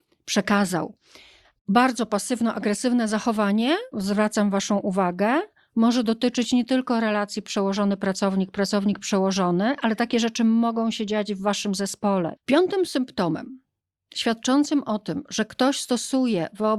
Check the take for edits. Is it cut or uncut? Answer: cut